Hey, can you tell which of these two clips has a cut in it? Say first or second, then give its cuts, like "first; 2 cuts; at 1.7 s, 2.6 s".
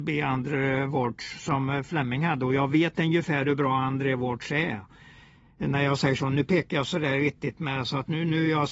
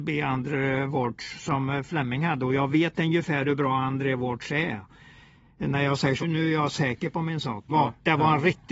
second; 2 cuts; at 6.2 s, 7.7 s